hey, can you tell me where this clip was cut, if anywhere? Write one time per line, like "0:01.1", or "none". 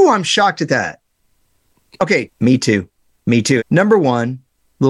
0:02.3
0:03.6